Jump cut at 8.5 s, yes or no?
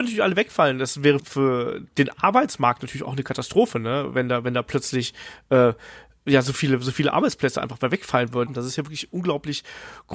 yes